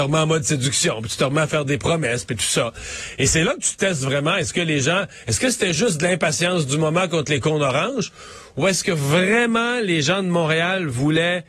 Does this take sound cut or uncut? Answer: uncut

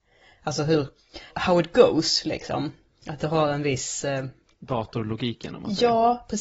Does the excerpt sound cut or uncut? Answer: cut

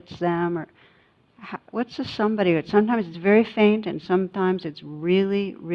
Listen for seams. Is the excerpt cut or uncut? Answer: uncut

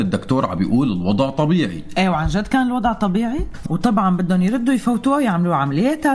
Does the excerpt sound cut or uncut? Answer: cut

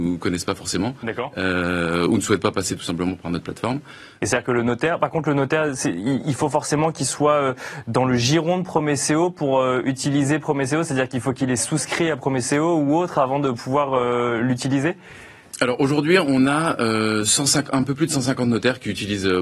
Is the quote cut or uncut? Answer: cut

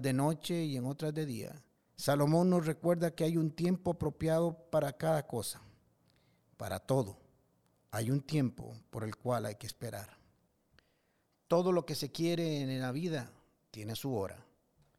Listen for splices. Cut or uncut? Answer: cut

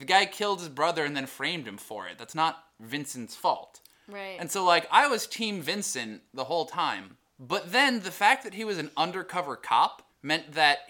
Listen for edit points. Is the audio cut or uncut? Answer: uncut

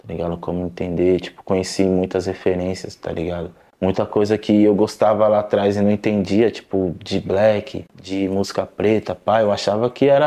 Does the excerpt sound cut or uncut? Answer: uncut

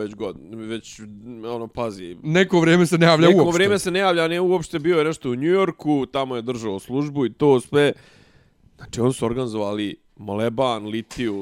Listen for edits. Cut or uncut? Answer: uncut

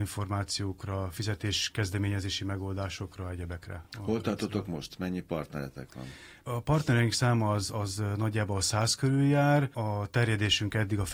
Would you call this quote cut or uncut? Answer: uncut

